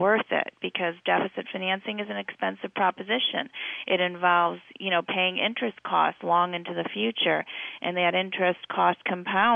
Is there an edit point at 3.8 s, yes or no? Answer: no